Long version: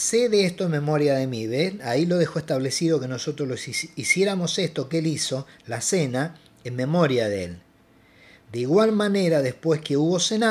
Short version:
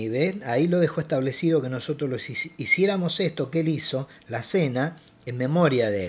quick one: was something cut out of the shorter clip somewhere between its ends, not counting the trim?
no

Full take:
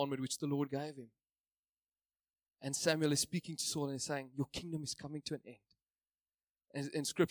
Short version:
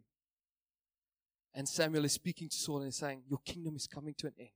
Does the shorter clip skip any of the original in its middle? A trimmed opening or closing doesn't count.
no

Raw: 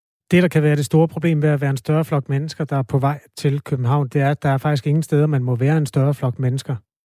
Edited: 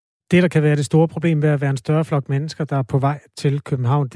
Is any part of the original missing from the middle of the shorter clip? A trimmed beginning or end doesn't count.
no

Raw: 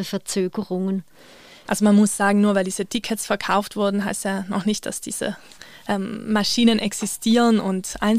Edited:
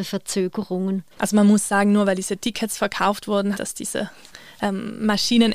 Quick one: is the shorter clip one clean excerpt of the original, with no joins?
no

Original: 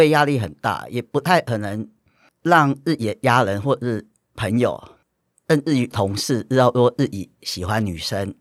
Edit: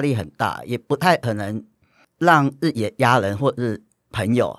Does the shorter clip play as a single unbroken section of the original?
yes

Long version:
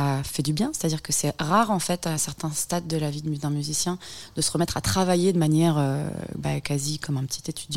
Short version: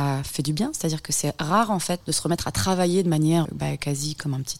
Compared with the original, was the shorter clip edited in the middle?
yes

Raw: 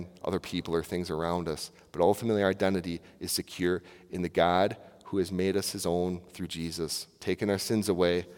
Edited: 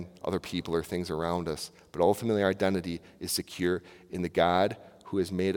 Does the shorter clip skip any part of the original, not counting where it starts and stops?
no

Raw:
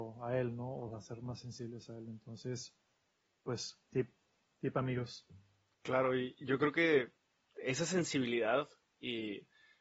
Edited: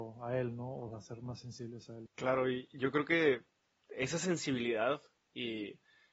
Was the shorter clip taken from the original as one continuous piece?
no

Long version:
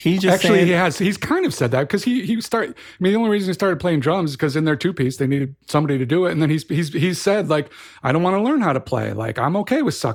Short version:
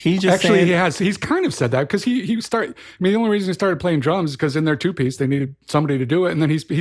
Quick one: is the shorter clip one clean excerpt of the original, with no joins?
yes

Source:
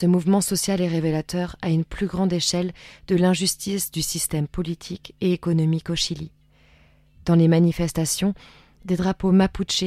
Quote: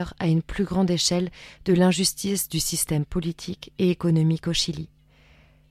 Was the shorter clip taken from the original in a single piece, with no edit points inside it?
yes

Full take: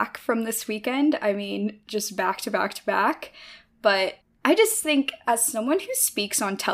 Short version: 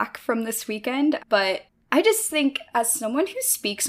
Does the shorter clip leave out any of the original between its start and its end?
yes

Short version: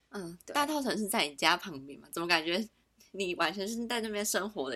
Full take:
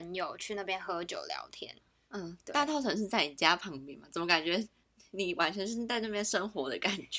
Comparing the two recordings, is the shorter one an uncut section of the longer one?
yes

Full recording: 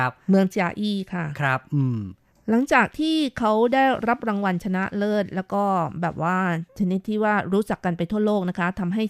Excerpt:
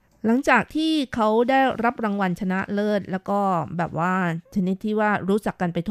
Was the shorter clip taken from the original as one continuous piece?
yes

